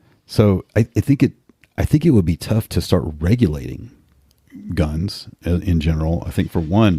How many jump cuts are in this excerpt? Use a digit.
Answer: 0